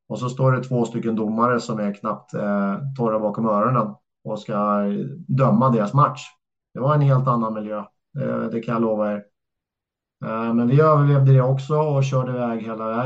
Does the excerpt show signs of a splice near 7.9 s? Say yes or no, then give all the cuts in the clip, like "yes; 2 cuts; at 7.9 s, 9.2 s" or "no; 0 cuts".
no; 0 cuts